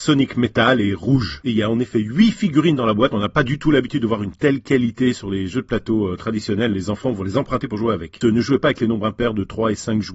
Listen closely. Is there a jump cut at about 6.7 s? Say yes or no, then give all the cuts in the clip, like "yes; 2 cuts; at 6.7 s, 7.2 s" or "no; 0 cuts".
yes; 2 cuts; at 6.7 s, 8.2 s